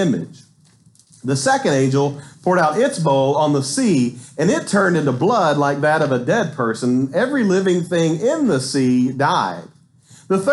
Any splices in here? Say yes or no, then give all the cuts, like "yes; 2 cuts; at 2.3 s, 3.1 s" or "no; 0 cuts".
no; 0 cuts